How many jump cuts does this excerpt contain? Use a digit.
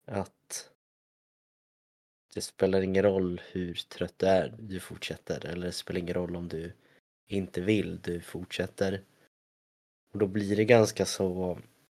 1